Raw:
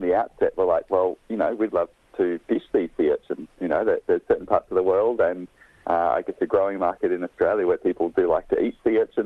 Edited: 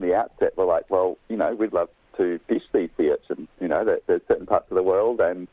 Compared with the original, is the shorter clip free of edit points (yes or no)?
yes